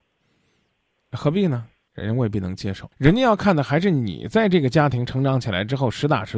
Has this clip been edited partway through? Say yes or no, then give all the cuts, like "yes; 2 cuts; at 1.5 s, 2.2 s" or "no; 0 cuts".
yes; 2 cuts; at 1.9 s, 2.9 s